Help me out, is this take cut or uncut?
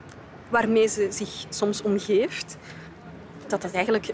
uncut